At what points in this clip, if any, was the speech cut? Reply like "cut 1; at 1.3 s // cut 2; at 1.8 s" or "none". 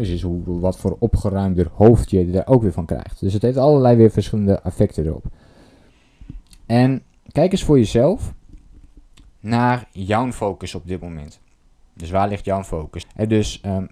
cut 1; at 13.0 s